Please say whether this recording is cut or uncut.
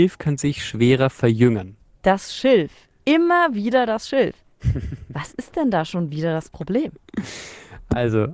uncut